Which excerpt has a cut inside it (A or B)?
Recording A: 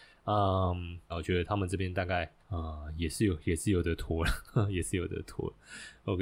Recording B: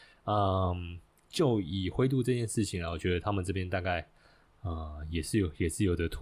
A